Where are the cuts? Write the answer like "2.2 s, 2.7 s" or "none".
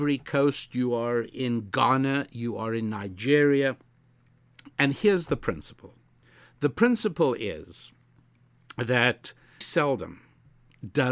4.7 s, 9.6 s